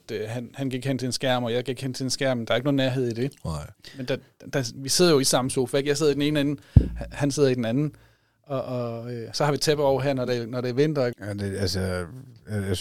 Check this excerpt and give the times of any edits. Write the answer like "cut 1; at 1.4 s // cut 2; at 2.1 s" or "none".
cut 1; at 11.1 s